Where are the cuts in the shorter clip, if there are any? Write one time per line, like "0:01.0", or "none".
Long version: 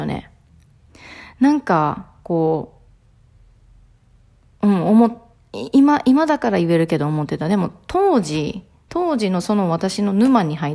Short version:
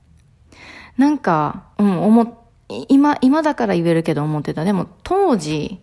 0:01.7